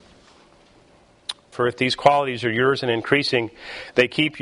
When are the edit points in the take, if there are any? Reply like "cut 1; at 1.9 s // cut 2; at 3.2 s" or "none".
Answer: cut 1; at 1.5 s